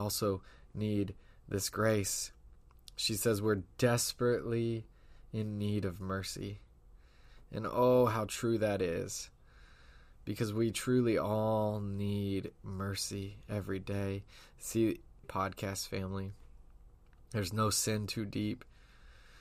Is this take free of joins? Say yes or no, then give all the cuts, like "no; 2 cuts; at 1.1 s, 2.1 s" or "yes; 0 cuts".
no; 1 cut; at 15.2 s